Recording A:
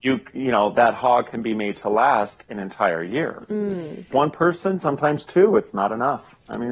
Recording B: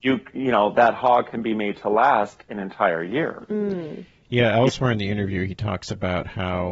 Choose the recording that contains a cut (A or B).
A